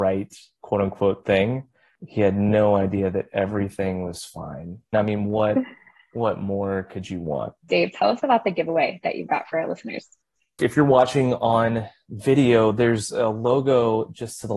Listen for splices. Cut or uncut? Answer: cut